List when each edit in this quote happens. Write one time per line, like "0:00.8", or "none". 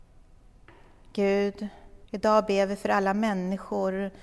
0:02.1